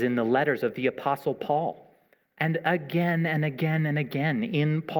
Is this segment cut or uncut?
uncut